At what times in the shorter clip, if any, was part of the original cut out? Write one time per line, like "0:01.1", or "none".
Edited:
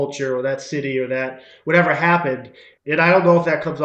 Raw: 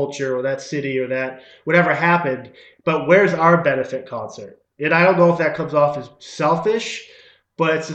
0:02.8